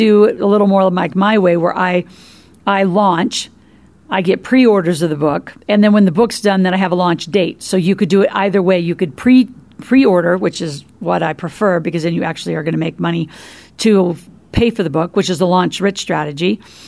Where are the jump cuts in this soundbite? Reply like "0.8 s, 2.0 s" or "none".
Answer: 5.6 s